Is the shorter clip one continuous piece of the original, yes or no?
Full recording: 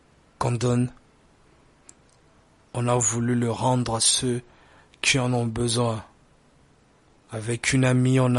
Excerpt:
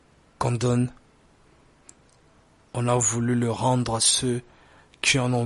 yes